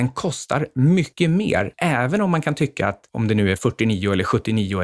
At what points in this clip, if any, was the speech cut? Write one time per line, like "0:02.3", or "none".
none

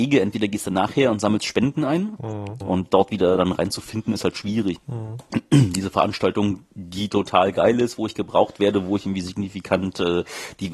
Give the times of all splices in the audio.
0:02.6
0:04.8

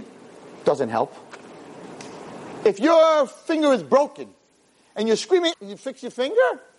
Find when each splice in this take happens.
0:05.5

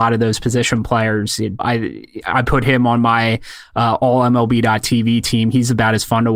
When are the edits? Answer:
0:01.6

